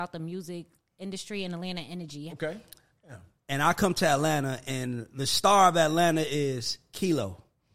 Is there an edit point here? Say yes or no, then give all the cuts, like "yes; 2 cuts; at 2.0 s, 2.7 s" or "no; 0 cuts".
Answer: yes; 1 cut; at 2.3 s